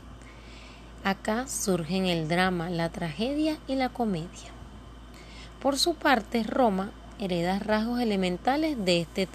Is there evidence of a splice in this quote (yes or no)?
no